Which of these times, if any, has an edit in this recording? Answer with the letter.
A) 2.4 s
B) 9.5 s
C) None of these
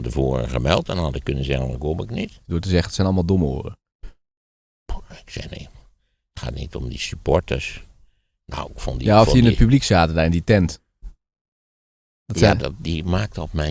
A